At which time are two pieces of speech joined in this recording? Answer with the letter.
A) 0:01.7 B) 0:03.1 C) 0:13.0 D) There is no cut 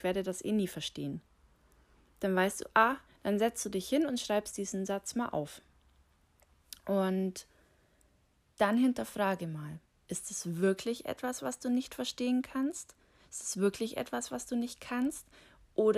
B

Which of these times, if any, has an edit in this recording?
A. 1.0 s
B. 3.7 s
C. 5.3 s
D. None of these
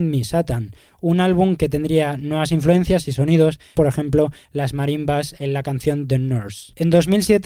B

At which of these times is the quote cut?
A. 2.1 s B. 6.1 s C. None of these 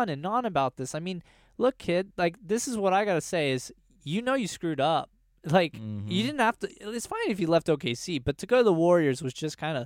C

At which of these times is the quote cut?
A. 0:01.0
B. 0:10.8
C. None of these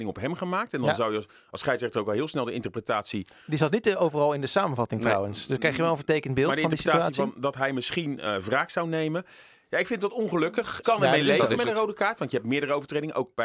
B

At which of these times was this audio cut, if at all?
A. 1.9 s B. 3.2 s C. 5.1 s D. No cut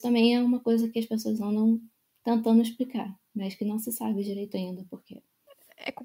D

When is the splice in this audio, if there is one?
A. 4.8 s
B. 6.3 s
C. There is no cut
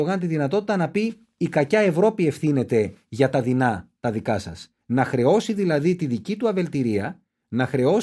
C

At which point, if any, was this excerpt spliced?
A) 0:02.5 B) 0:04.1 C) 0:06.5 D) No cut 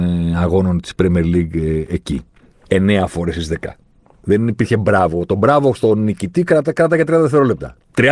A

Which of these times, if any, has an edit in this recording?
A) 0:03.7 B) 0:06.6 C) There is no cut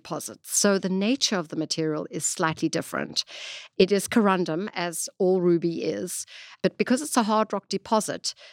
C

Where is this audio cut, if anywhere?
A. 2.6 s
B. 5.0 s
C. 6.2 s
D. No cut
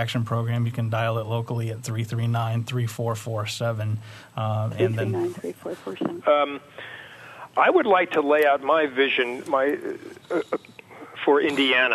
C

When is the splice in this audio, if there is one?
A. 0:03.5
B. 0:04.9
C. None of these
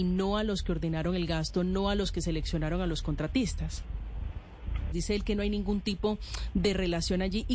B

